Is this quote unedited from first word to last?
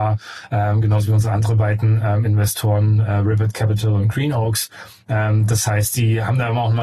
yes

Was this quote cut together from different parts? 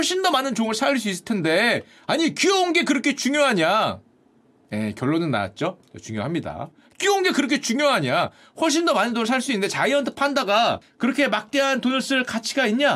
no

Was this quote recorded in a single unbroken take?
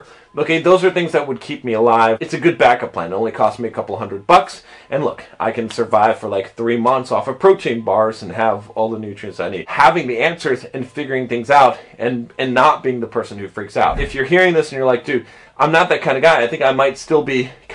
yes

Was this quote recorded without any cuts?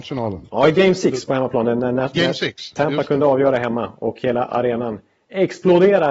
yes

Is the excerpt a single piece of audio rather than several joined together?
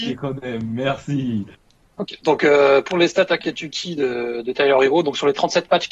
yes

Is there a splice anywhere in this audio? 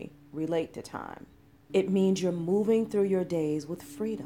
yes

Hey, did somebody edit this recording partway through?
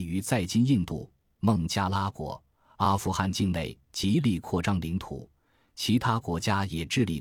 yes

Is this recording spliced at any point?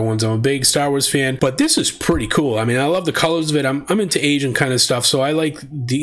no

